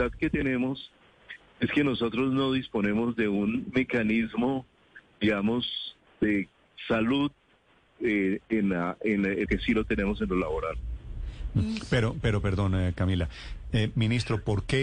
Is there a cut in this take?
yes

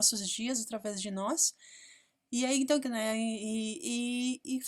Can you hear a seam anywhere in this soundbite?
yes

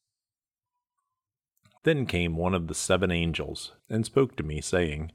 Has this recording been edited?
yes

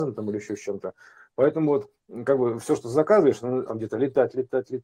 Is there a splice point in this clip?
yes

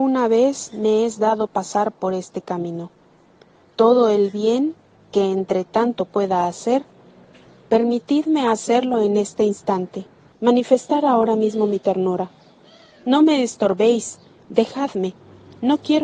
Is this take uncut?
yes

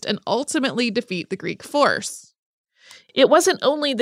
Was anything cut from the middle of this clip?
no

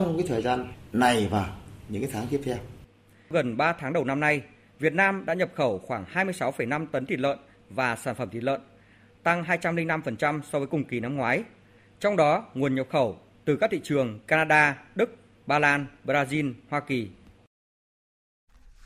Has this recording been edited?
no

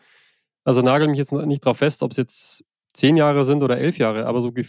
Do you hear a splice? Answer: no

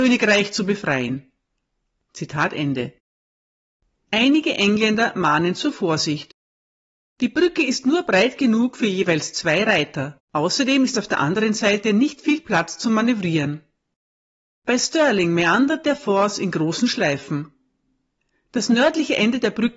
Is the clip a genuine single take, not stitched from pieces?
no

